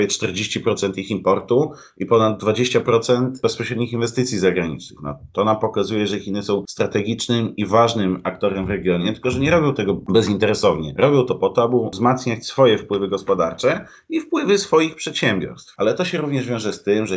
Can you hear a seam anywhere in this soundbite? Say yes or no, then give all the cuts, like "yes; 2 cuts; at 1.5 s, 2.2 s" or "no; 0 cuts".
no; 0 cuts